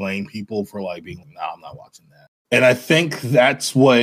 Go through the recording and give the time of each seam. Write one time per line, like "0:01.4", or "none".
0:01.2
0:02.3